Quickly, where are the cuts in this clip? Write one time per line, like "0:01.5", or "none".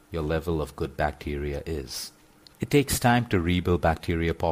0:02.5